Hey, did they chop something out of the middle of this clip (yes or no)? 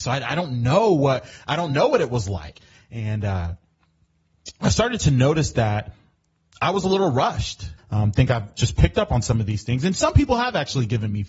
yes